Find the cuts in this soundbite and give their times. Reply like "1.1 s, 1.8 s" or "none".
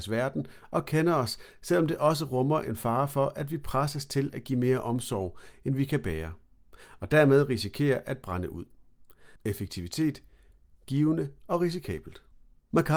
9.4 s